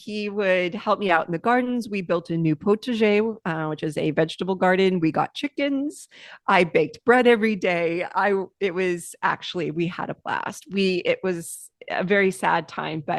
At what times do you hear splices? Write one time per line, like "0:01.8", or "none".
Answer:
none